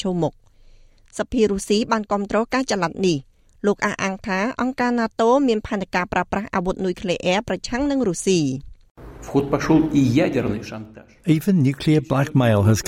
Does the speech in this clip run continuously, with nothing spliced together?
yes; 0 cuts

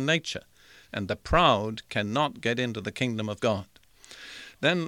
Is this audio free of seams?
yes; 0 cuts

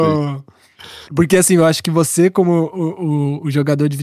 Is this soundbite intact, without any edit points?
no; 1 cut; at 1.0 s

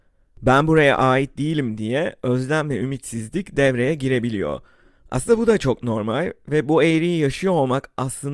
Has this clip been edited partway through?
no; 0 cuts

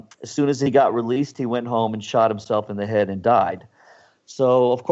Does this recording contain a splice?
no; 0 cuts

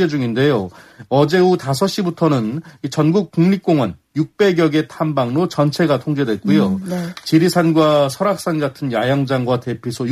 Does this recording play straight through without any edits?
yes; 0 cuts

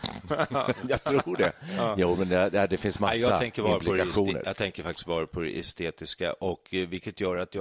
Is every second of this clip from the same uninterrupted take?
yes; 0 cuts

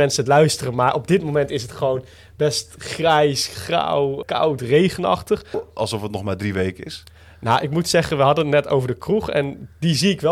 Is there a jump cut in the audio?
yes; 2 cuts; at 4.2 s, 5.5 s

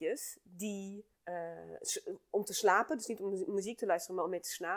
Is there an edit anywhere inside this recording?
yes; 1 cut; at 1.1 s

